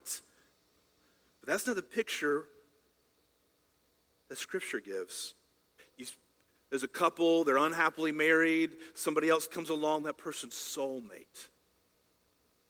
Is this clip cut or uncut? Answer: cut